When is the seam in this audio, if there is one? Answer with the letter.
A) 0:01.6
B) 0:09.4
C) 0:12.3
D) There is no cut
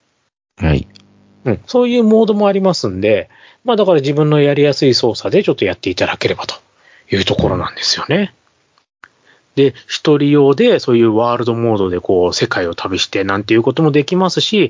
D